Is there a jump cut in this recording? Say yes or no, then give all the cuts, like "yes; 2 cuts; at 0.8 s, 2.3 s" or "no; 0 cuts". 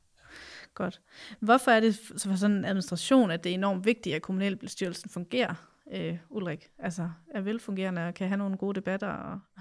no; 0 cuts